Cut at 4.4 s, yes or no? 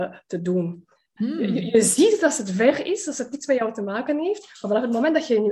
no